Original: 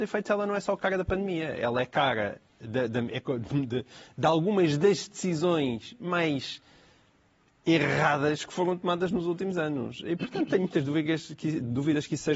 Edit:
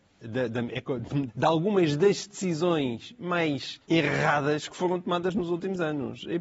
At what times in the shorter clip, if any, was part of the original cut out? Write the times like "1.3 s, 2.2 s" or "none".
1.3 s, 3.8 s